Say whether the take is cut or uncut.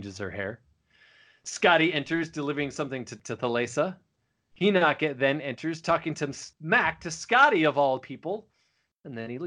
uncut